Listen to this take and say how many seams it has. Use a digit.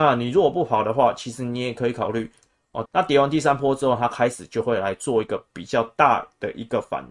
1